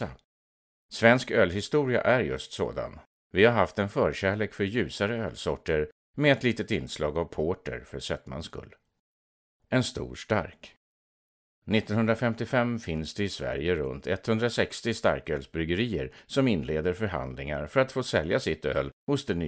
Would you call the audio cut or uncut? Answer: uncut